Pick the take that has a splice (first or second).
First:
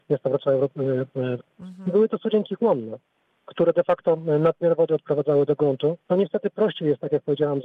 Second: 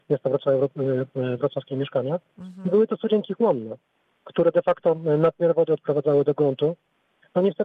first